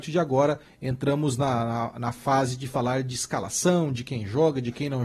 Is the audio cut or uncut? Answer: uncut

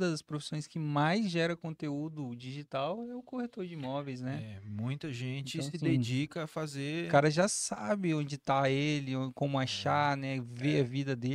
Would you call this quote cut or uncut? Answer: uncut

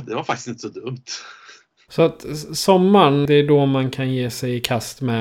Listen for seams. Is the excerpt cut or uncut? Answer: cut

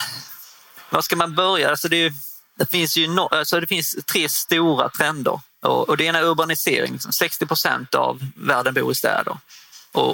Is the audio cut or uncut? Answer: uncut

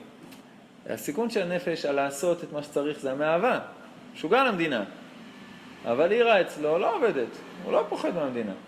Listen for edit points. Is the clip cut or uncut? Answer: uncut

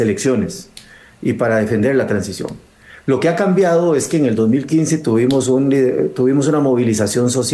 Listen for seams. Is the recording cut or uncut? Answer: uncut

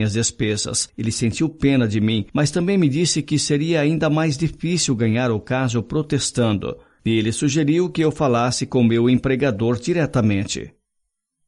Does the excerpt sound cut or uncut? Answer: uncut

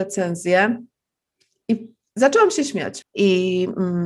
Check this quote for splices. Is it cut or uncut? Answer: cut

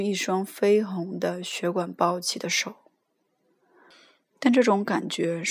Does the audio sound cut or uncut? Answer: uncut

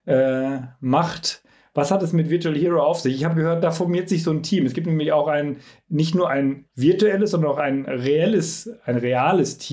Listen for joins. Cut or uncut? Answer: uncut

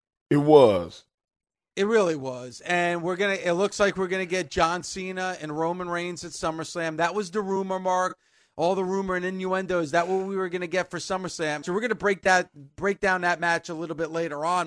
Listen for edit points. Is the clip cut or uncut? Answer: cut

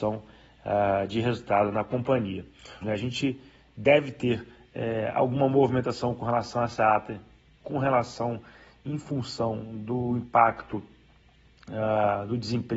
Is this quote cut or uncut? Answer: cut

